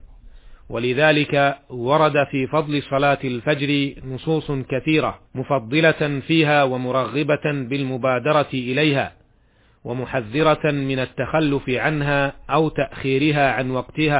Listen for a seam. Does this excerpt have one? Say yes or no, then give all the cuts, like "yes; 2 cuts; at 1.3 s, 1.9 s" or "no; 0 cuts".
yes; 1 cut; at 5.3 s